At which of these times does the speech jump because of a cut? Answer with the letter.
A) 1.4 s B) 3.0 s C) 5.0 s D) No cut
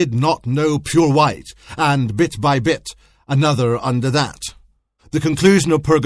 C